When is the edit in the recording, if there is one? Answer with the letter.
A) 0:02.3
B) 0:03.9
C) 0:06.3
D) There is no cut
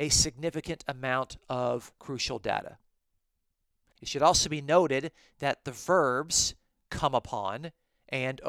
B